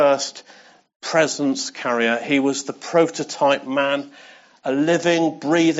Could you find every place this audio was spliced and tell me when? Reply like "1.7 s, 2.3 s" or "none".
none